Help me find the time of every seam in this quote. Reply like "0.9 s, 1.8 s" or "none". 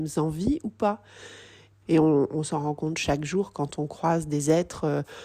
1.8 s